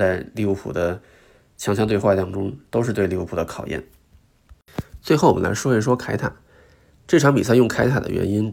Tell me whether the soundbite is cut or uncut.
uncut